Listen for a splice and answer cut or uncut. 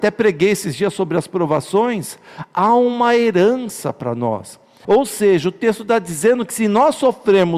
cut